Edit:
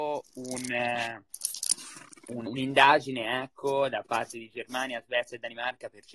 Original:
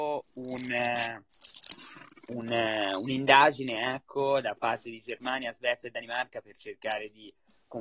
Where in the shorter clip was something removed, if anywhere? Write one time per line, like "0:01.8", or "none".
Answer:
0:02.5